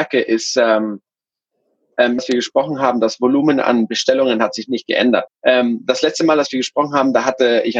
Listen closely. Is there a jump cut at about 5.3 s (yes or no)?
yes